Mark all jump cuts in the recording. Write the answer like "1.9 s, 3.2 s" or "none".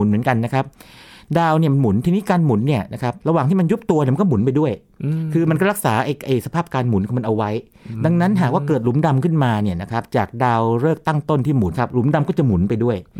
3.2 s, 11.7 s